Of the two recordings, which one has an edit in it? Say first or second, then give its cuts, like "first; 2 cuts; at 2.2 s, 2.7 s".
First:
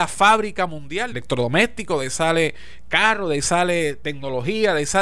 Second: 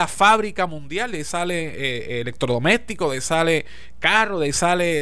first; 1 cut; at 1.1 s